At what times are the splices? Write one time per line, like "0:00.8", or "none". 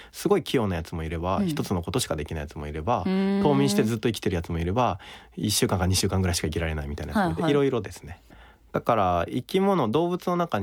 0:08.3